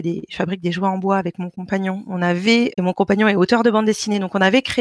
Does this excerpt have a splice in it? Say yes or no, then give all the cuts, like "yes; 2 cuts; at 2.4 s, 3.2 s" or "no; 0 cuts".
yes; 1 cut; at 2.7 s